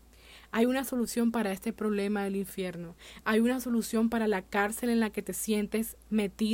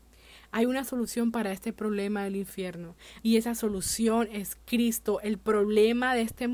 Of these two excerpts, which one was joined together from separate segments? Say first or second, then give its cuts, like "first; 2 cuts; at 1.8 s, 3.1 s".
second; 1 cut; at 3.2 s